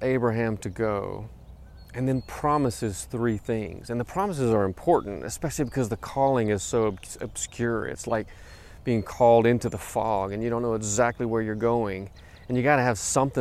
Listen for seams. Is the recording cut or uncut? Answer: uncut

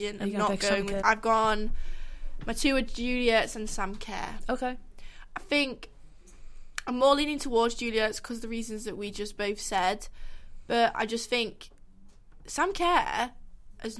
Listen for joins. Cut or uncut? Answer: cut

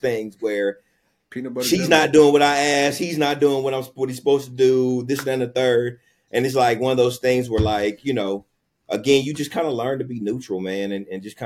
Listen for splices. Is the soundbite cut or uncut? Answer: uncut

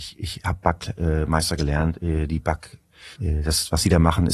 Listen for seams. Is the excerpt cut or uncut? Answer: cut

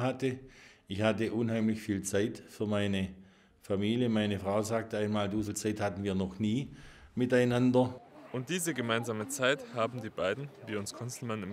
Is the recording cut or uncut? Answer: cut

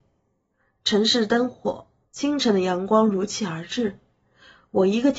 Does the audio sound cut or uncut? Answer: cut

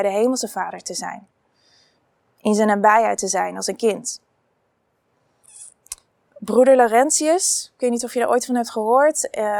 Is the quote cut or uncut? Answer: uncut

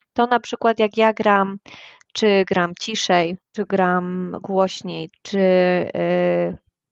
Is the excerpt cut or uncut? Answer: cut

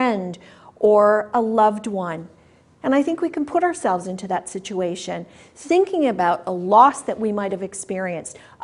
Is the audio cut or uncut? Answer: cut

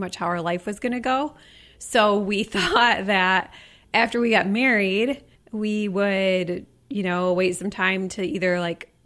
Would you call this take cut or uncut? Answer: uncut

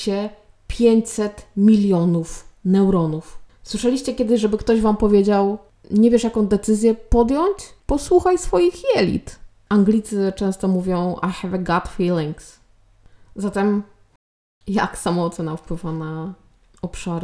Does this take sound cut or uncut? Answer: uncut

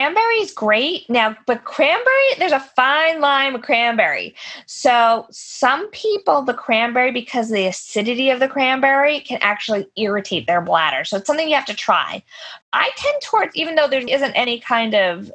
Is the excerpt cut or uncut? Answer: cut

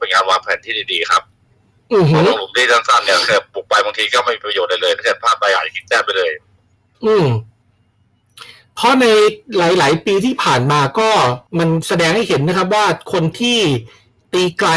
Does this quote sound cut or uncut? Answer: cut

